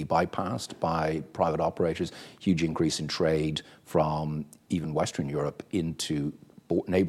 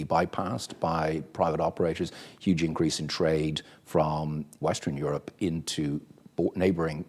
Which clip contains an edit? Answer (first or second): second